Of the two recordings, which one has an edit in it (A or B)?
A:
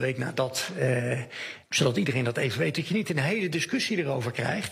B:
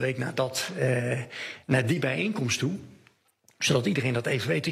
A